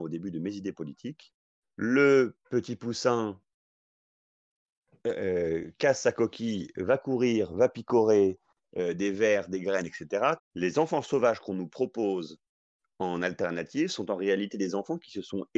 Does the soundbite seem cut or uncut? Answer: cut